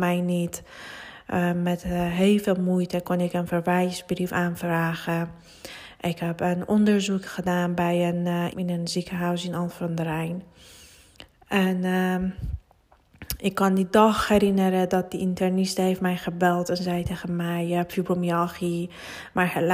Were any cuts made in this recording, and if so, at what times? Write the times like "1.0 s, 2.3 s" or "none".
8.5 s